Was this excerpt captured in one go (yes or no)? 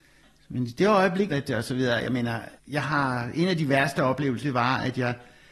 no